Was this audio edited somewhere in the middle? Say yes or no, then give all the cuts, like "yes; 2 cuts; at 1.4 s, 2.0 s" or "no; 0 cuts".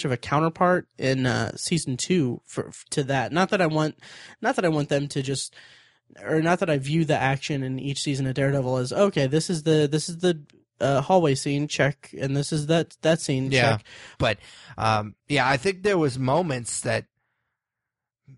yes; 2 cuts; at 14.2 s, 15.2 s